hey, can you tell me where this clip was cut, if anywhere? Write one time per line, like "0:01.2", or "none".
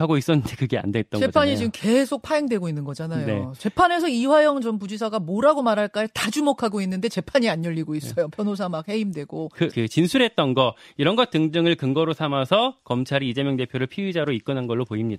0:09.7